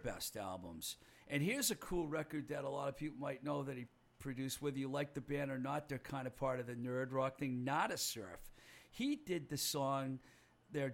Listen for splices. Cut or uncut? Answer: uncut